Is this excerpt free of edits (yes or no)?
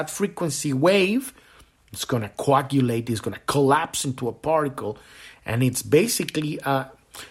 yes